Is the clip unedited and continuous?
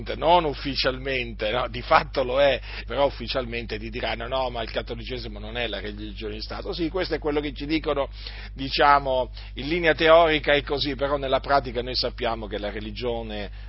no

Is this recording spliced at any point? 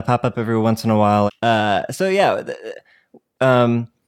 yes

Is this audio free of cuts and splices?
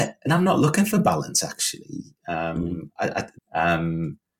no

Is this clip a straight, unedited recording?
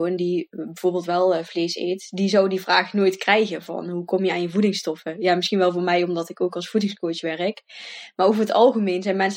yes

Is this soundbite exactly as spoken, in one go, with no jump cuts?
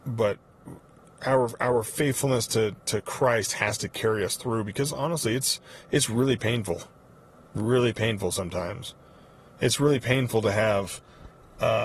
yes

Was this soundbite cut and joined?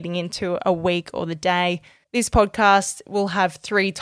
yes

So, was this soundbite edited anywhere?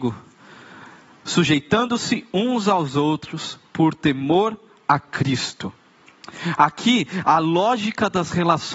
yes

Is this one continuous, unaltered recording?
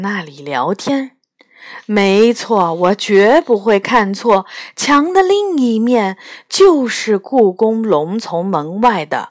yes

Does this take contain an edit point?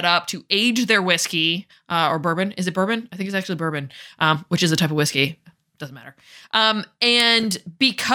no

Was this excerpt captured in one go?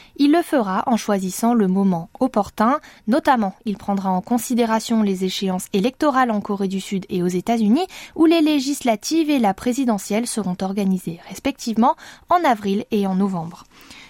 yes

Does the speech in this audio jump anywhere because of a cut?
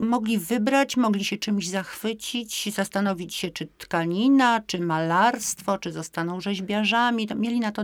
no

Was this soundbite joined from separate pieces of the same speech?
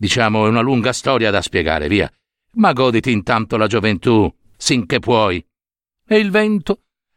yes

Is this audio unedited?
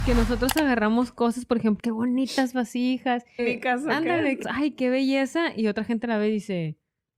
no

